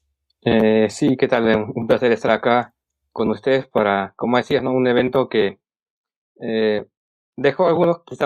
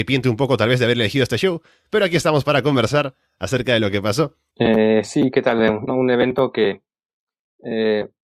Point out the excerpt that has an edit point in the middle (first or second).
second